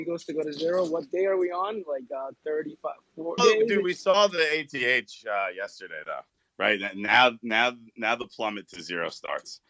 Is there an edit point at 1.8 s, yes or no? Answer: no